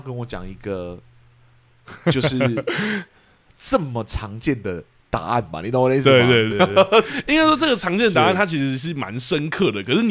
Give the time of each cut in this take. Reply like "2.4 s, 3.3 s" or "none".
6.5 s

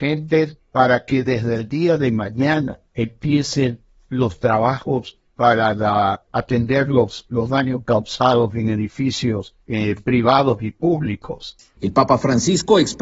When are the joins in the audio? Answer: 9.6 s

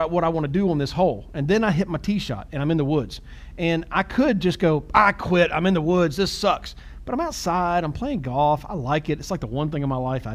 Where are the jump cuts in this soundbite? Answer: none

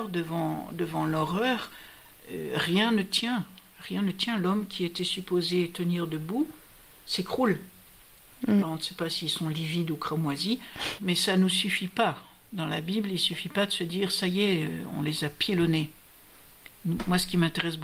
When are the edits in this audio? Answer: 8.6 s, 11.0 s

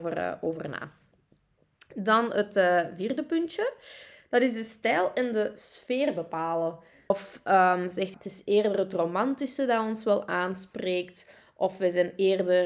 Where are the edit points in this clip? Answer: 7.1 s, 8.1 s

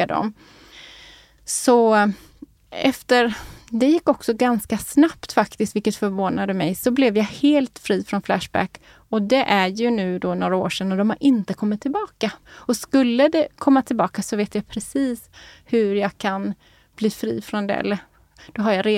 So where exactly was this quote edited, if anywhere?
12.4 s

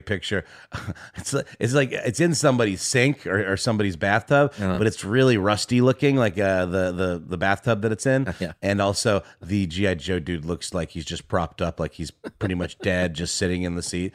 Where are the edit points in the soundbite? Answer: none

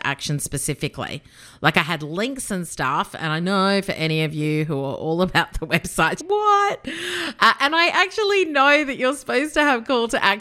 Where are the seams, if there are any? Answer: 6.2 s

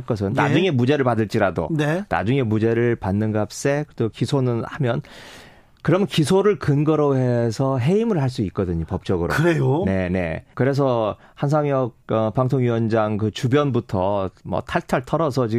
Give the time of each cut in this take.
10.5 s, 12.0 s

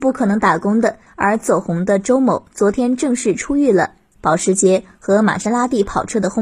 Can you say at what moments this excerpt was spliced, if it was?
1.1 s, 4.2 s

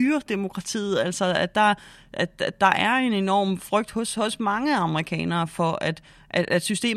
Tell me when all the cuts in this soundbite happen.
none

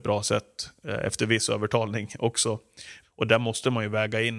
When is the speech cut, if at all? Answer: 3.0 s

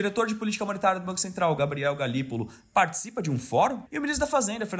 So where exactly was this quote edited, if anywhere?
3.9 s

